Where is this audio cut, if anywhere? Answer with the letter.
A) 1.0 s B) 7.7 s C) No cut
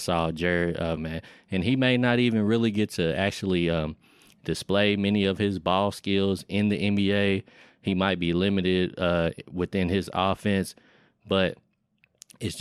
A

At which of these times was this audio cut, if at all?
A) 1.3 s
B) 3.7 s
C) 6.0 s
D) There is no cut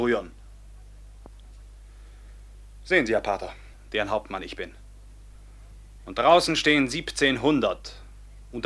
B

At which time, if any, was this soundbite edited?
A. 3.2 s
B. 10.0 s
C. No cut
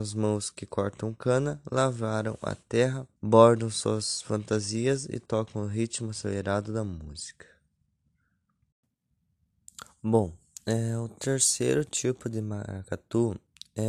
A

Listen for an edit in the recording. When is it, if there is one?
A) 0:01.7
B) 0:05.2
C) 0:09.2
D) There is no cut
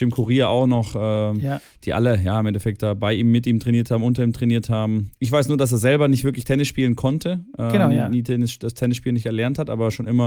C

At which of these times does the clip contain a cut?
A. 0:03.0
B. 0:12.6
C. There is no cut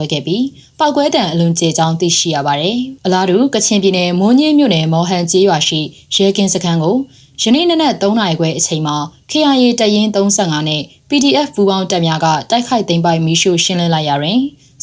A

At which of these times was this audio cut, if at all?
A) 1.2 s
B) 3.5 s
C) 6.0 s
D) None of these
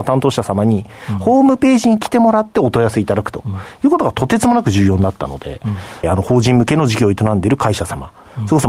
C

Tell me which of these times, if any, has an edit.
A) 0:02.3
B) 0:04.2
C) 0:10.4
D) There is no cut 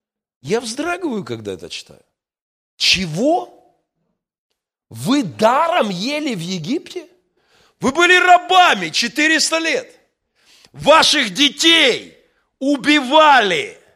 D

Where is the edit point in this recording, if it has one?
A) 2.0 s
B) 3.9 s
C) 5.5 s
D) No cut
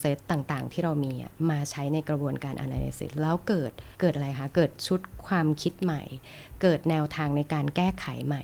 B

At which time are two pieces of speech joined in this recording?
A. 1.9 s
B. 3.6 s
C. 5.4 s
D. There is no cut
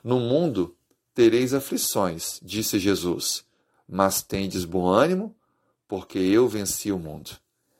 D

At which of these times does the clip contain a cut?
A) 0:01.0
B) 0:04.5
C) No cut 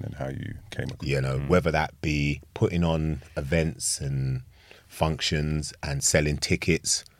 A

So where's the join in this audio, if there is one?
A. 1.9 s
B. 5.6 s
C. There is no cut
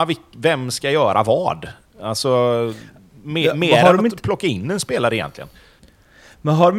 C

